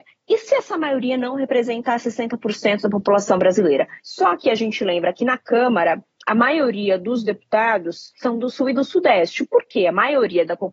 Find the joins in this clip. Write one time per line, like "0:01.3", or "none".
0:04.0